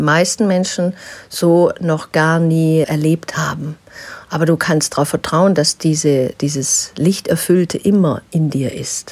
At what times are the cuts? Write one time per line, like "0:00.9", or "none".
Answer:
0:02.8